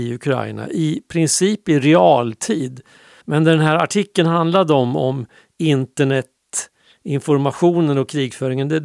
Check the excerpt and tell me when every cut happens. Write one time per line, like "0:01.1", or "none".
0:03.2